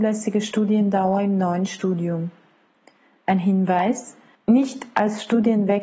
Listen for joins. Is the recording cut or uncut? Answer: uncut